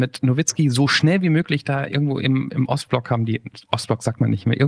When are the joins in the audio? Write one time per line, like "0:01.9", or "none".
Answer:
none

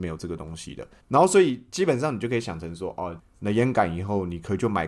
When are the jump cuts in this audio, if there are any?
0:01.0
0:03.2

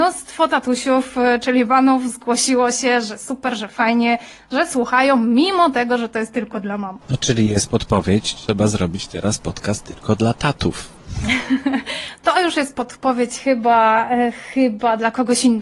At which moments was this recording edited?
0:07.0

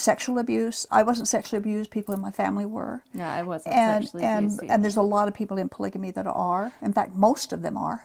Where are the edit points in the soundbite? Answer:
none

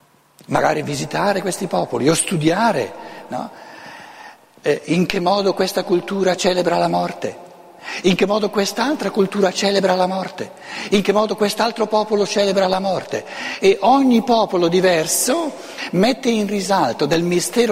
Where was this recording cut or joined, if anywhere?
none

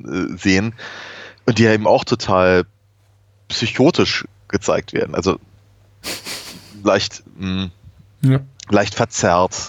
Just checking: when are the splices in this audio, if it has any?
none

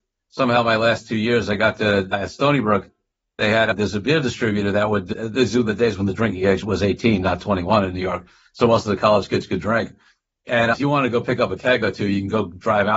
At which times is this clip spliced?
none

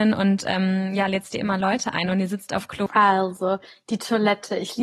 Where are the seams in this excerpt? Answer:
0:02.9

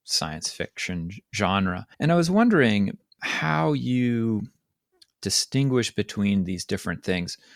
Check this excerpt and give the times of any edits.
0:01.9

